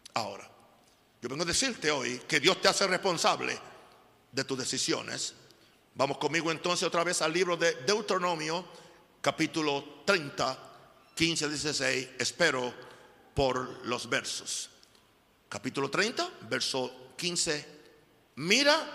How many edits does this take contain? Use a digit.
0